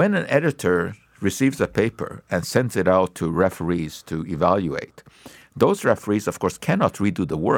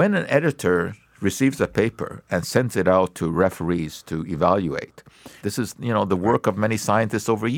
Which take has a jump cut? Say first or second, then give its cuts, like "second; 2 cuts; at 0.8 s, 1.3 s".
second; 1 cut; at 5.4 s